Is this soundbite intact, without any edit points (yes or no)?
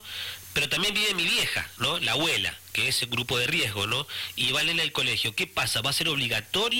yes